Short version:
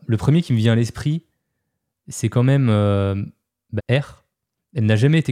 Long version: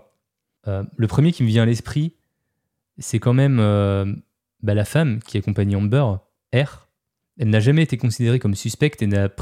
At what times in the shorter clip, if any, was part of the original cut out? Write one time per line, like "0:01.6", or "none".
0:03.8